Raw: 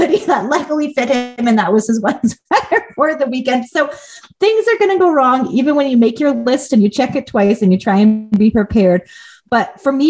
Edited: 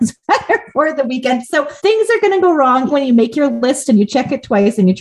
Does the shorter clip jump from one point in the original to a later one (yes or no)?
yes